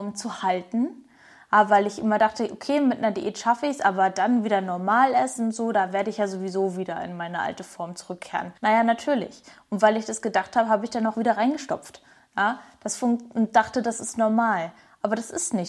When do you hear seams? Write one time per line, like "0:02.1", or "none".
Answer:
0:08.6
0:11.1